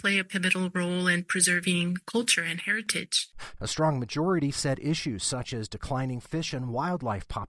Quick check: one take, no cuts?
no; 1 cut; at 3.6 s

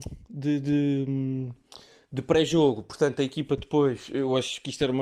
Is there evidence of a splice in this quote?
no; 0 cuts

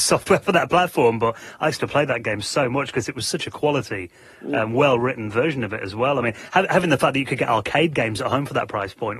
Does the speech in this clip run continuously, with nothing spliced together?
yes; 0 cuts

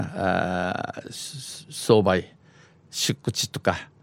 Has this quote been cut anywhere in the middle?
no; 0 cuts

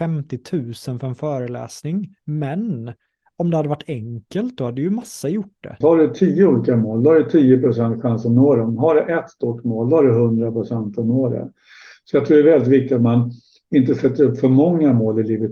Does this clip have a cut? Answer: yes; 1 cut; at 5.8 s

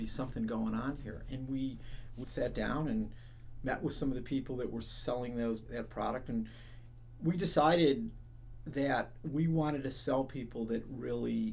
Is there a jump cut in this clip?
yes; 2 cuts; at 2.2 s, 5.7 s

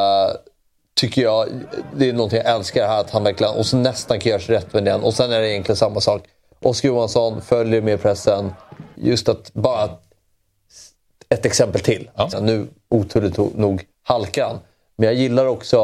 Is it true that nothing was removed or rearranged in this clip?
no; 3 cuts; at 8.9 s, 12.3 s, 13.9 s

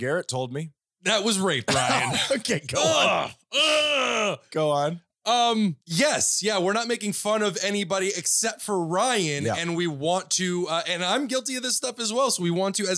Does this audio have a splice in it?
yes; 1 cut; at 5.8 s

